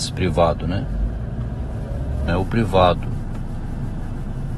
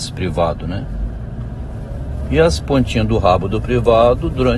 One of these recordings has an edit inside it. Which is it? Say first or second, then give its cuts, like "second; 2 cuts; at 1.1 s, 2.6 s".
first; 1 cut; at 2.3 s